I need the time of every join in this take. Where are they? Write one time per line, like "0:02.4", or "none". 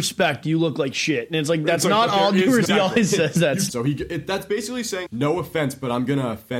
0:02.6
0:03.7
0:05.1